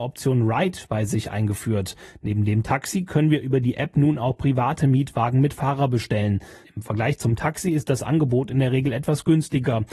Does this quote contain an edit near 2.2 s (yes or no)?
no